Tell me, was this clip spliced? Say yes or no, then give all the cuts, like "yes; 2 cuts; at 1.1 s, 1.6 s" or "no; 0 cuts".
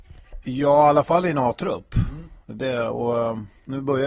yes; 1 cut; at 2.4 s